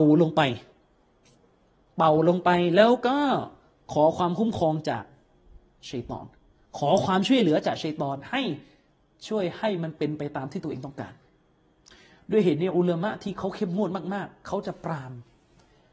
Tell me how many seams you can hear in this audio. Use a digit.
0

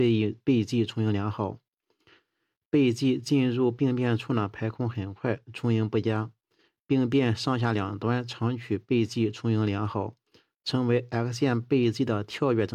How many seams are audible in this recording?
0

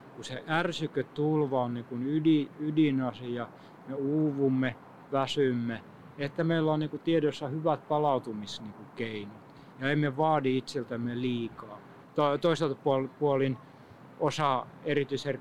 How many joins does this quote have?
2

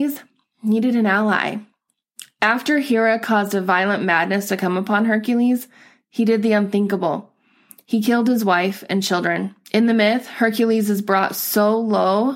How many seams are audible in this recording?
1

